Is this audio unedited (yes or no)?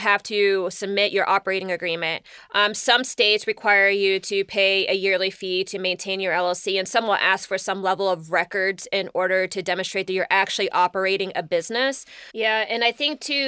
no